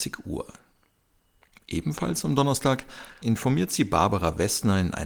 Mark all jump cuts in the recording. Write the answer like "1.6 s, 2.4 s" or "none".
3.2 s